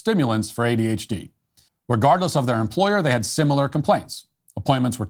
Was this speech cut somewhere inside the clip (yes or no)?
yes